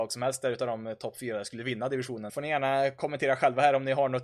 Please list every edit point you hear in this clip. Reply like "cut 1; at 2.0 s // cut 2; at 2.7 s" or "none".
cut 1; at 2.3 s

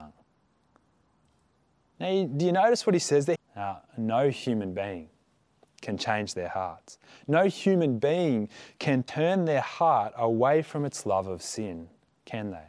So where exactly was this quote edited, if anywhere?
cut 1; at 3.3 s

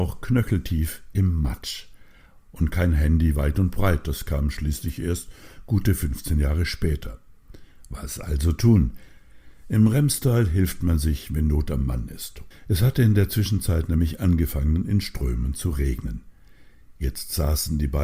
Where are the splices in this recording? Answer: cut 1; at 12.5 s

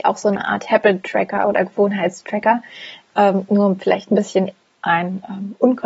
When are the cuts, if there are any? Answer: none

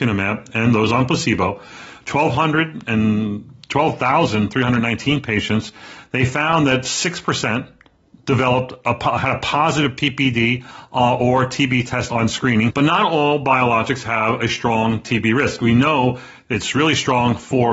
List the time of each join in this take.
cut 1; at 12.7 s

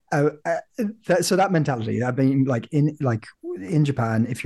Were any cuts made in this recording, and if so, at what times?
cut 1; at 3.3 s

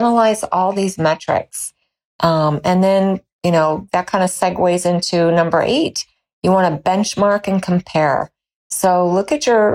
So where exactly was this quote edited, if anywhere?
none

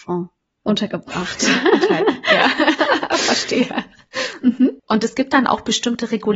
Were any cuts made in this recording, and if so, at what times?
cut 1; at 4.8 s

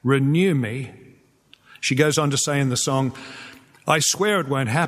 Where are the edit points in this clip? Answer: none

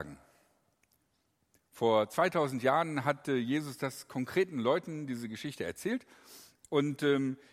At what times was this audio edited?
none

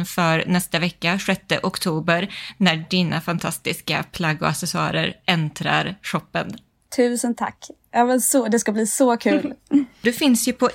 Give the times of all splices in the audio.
none

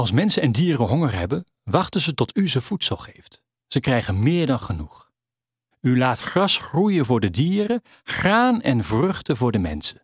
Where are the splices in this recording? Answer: cut 1; at 3.6 s // cut 2; at 5.7 s

